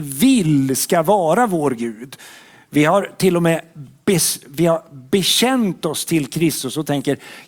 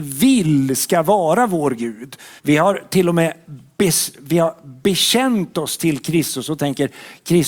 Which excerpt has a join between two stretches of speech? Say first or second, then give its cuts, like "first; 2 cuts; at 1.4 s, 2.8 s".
second; 1 cut; at 2.4 s